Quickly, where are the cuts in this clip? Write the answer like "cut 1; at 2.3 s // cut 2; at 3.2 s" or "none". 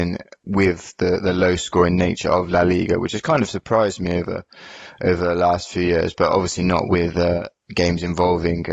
none